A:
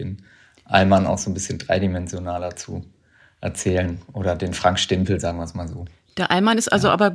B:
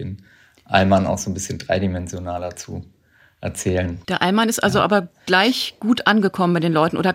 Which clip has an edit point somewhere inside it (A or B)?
B